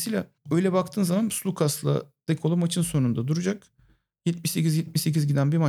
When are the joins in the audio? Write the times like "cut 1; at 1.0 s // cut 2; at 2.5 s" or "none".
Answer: none